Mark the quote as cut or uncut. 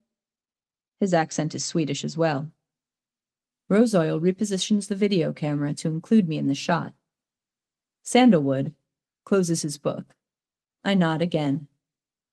cut